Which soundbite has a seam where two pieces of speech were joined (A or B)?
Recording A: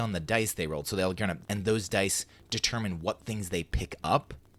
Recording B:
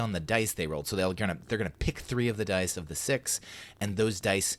A